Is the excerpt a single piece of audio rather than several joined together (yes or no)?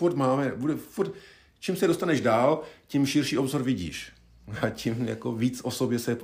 yes